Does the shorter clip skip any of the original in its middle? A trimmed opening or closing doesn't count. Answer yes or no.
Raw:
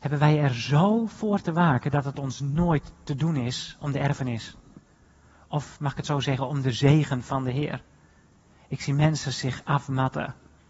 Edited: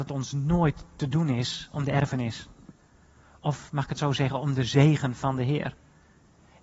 no